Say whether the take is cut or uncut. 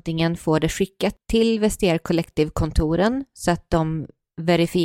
uncut